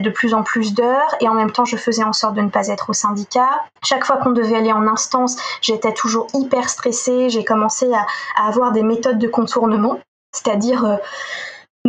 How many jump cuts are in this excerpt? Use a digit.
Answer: 1